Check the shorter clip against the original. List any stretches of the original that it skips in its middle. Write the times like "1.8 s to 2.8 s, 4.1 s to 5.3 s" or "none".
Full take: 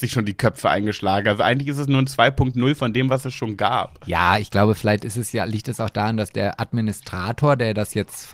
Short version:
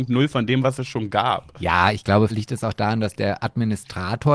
4.8 s to 5.5 s